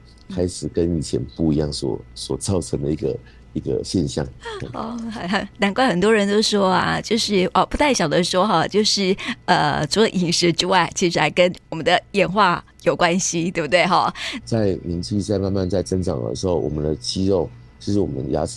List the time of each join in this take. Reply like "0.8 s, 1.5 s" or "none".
14.4 s